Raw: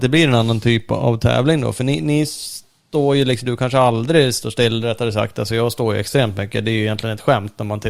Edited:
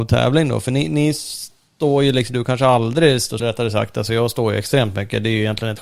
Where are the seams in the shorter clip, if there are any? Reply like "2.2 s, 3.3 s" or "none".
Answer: 3.4 s